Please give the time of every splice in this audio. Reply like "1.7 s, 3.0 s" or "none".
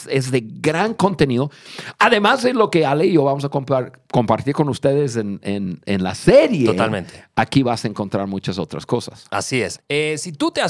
9.8 s